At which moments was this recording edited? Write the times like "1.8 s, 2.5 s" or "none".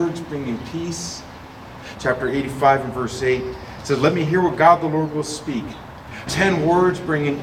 1.9 s, 6.3 s